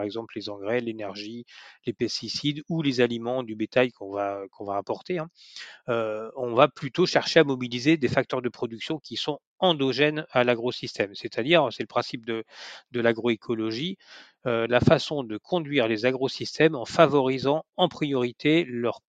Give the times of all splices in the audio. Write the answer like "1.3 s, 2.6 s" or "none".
none